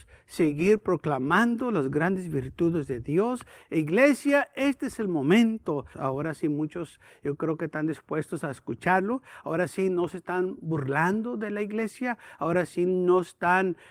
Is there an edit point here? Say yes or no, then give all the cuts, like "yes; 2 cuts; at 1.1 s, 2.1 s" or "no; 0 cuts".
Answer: yes; 1 cut; at 5.9 s